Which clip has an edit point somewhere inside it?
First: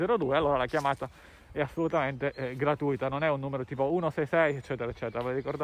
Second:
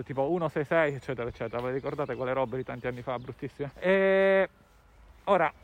second; 1 cut; at 3.7 s

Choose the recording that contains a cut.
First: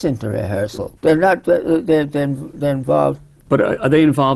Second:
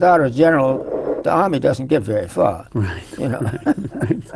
first; 1 cut; at 1.0 s

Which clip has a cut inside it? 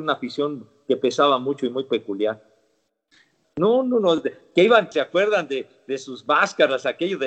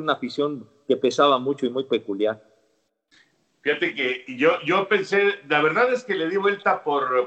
first; 2 cuts; at 3.4 s, 4.9 s

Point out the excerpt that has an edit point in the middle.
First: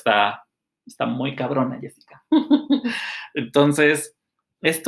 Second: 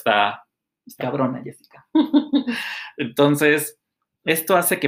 second; 1 cut; at 1.0 s

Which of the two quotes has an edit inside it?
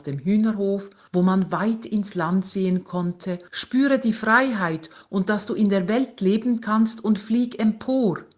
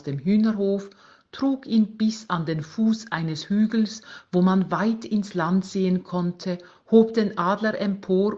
first; 2 cuts; at 1.1 s, 3.5 s

